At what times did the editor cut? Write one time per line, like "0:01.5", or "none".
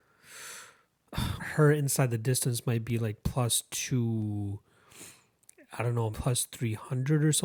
0:01.4
0:06.1